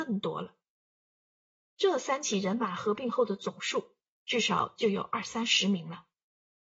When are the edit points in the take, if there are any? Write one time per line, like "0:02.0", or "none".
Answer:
none